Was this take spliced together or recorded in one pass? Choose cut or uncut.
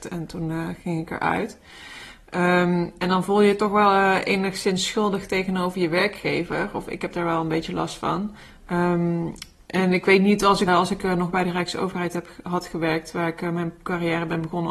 cut